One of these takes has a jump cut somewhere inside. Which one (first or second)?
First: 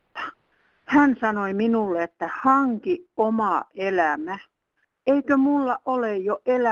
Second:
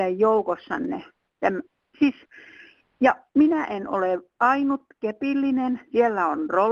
second